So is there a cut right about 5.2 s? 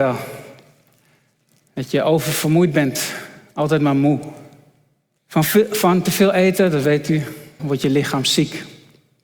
yes; 2 cuts; at 5.2 s, 7.6 s

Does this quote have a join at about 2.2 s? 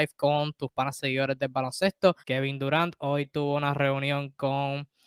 yes; 1 cut; at 2.2 s

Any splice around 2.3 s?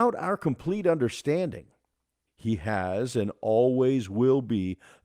yes; 1 cut; at 2.3 s

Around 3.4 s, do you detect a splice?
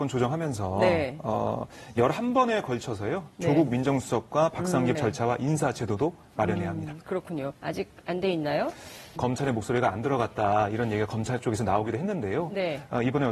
no; 3 cuts; at 5.0 s, 7.5 s, 9.2 s

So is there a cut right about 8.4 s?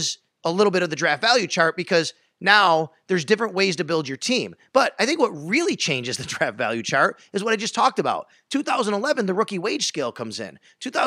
no; 0 cuts

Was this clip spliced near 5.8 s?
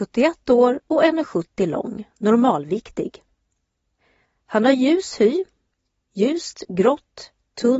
no; 0 cuts

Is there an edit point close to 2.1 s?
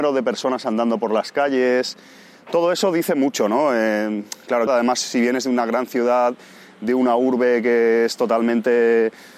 no; 1 cut; at 4.7 s

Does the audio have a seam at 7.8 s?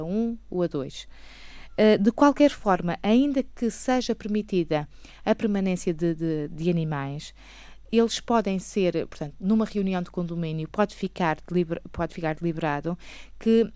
yes; 1 cut; at 7.8 s

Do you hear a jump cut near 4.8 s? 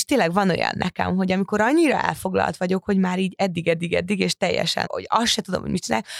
yes; 1 cut; at 4.8 s

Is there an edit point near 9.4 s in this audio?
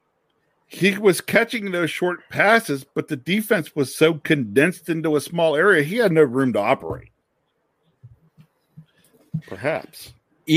yes; 1 cut; at 9.4 s

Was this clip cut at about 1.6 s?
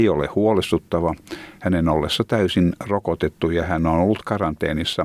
no; 0 cuts

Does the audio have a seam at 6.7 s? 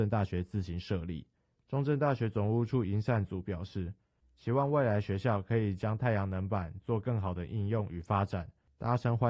no; 2 cuts; at 1.6 s, 4.2 s

